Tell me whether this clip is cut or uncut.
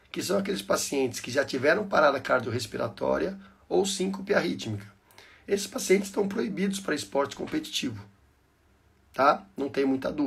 uncut